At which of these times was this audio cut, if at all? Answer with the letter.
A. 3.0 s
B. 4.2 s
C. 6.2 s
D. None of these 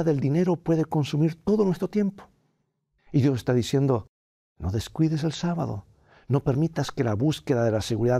A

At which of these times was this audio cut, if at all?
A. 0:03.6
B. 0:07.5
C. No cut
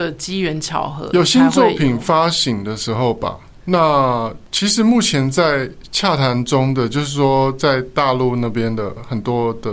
A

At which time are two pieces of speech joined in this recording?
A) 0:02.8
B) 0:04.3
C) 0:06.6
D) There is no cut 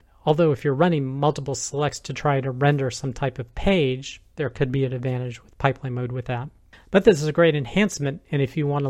D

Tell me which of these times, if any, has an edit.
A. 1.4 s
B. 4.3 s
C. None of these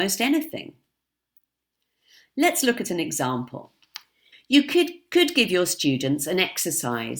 B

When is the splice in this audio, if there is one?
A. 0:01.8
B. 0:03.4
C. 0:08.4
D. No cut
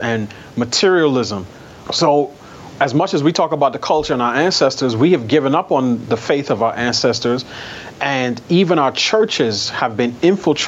A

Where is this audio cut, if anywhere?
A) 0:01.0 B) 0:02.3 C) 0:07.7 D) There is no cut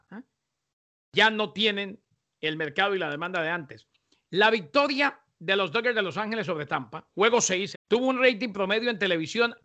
C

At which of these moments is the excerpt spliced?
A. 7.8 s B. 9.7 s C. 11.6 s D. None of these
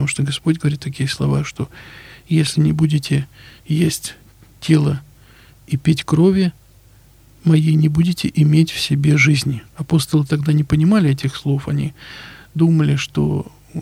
B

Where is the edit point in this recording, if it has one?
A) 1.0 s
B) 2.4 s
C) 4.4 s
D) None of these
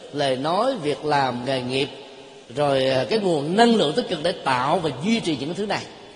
B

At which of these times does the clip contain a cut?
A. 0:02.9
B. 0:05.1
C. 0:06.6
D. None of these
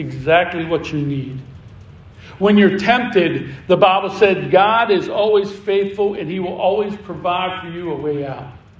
D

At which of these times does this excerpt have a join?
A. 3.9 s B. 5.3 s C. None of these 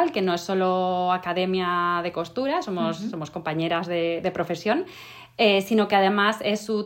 C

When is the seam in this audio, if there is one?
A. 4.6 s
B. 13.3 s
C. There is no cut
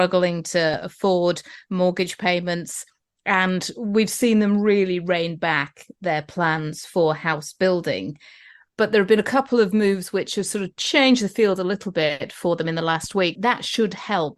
B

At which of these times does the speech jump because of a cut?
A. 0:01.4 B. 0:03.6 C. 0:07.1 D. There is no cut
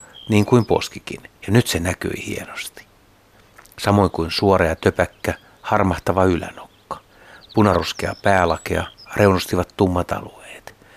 A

